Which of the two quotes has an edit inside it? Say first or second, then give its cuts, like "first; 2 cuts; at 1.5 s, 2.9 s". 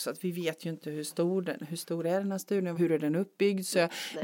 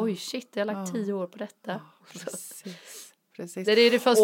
first; 1 cut; at 2.8 s